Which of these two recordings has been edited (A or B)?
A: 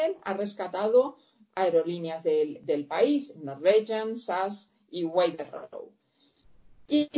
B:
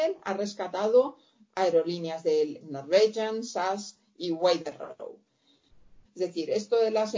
B